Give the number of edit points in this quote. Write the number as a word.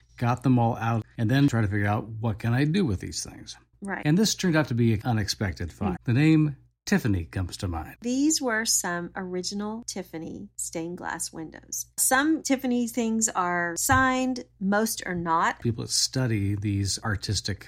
three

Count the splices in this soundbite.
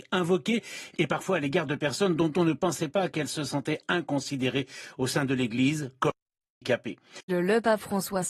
one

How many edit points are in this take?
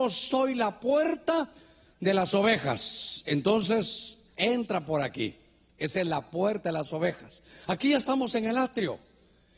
zero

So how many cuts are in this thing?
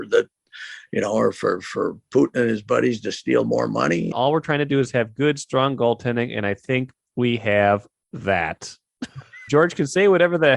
two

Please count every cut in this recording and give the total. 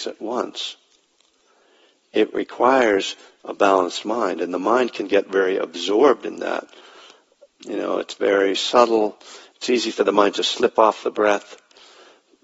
one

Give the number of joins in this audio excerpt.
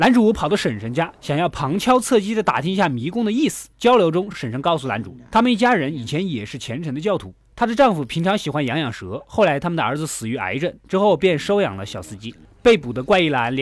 zero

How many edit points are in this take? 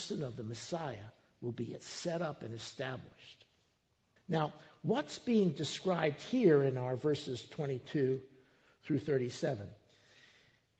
one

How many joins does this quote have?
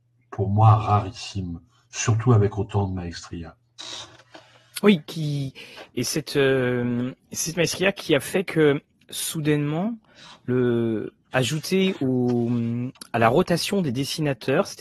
zero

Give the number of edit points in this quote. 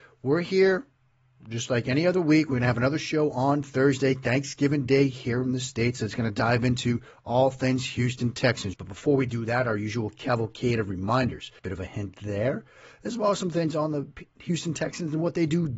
two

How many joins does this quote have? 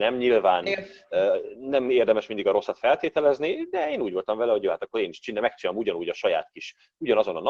zero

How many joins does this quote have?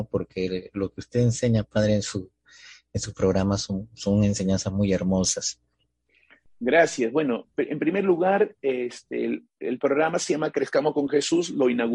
zero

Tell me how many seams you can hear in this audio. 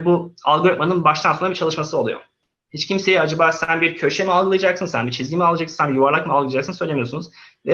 one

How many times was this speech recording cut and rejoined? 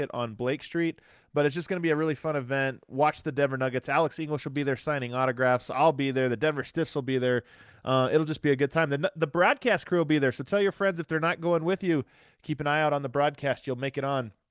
zero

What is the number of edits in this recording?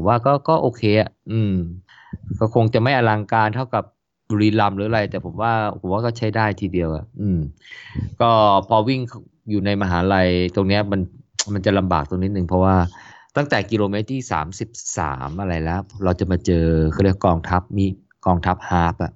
zero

